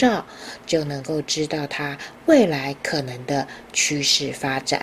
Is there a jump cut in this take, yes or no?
no